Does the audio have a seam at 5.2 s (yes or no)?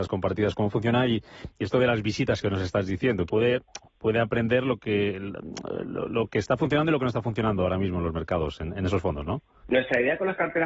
no